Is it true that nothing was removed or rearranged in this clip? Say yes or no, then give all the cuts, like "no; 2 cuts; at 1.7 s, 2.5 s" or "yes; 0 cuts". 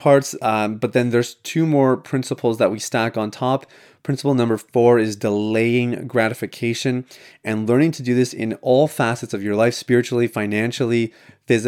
yes; 0 cuts